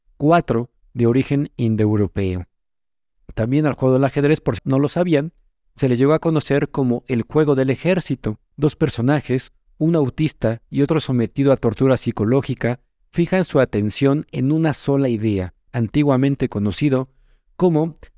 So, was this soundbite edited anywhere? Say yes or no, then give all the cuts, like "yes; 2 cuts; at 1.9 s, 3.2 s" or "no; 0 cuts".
yes; 3 cuts; at 4.6 s, 8.5 s, 15.7 s